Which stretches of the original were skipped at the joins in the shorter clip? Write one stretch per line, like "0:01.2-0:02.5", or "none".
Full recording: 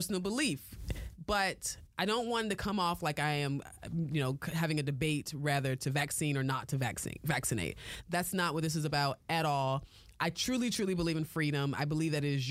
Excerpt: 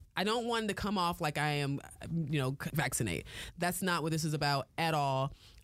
0:04.5-0:07.2

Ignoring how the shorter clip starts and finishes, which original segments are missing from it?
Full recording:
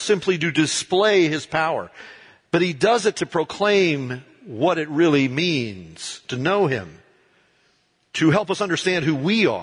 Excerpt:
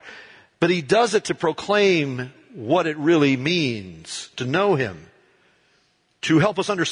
none

